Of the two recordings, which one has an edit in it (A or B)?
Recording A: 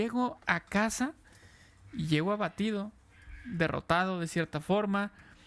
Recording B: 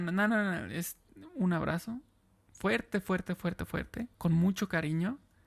B